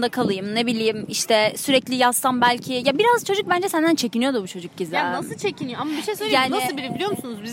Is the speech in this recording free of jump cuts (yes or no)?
yes